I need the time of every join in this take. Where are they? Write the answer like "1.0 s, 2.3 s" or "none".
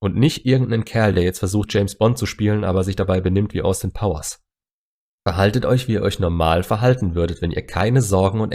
none

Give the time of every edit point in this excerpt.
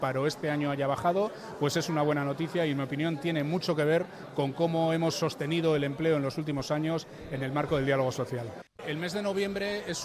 8.7 s

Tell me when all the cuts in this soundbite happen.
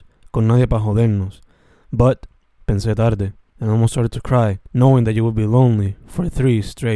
3.5 s, 4.7 s

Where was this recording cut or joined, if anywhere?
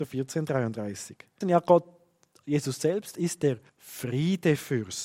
1.4 s, 3.7 s

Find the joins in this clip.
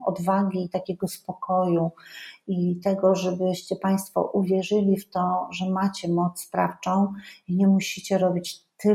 none

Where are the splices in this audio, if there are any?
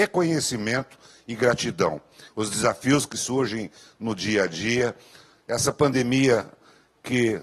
2.3 s

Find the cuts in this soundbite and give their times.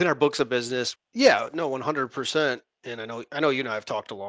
1.0 s

